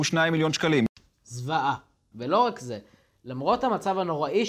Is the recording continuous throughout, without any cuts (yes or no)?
no